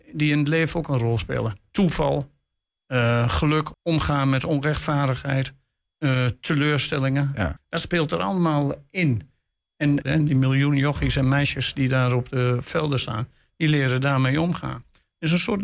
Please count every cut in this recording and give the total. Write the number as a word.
three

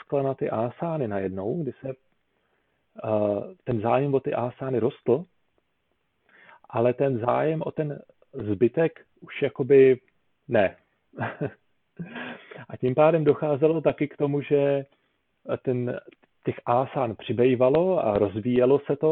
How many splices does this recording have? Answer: zero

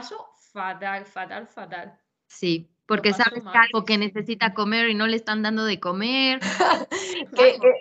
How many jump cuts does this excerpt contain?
two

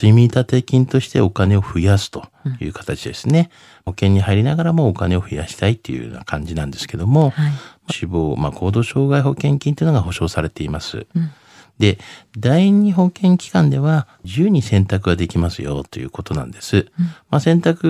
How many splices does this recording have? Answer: one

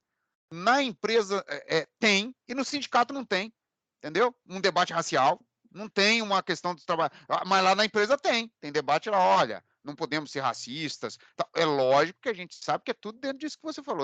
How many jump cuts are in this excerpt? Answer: zero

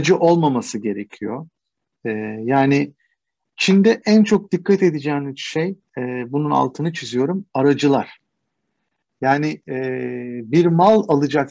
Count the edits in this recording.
zero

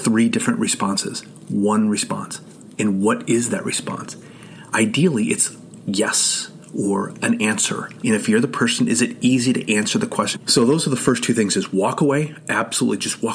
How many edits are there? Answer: two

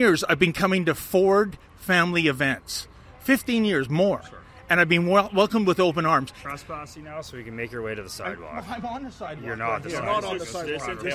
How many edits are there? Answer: one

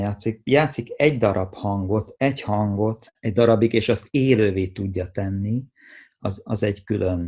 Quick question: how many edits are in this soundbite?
zero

